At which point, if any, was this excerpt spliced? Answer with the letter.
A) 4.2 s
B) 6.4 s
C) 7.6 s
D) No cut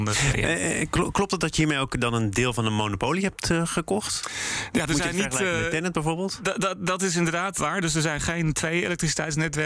C